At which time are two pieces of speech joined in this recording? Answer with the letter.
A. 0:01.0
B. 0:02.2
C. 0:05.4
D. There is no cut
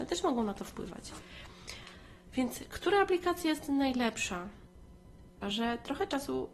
C